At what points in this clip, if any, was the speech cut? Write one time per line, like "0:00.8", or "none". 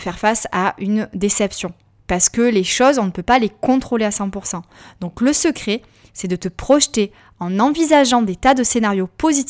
none